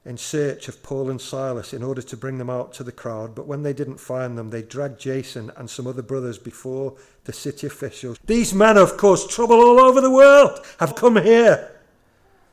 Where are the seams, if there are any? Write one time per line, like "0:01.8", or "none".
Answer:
0:08.2
0:10.9